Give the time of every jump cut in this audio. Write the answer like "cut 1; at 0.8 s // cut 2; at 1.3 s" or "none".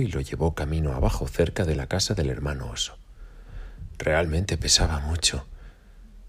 none